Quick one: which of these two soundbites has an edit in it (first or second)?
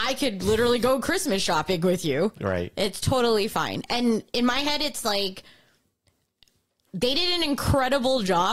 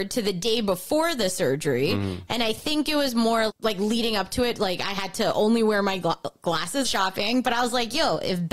second